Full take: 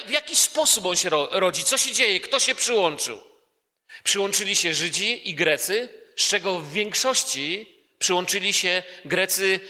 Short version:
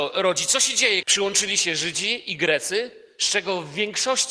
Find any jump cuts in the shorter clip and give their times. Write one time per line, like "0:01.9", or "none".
0:01.0

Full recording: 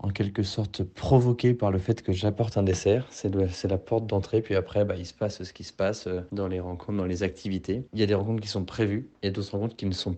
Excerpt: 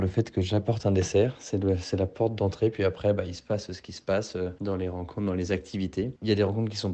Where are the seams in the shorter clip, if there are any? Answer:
none

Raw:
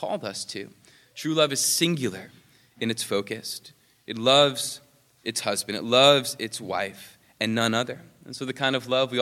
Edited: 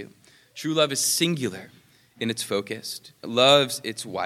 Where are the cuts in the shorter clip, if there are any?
0:03.2

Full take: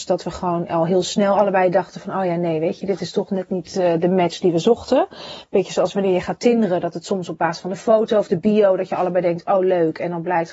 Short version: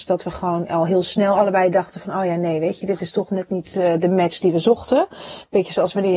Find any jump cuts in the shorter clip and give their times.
none

